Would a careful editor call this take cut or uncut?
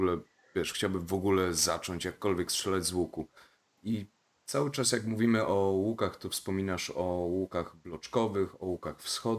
uncut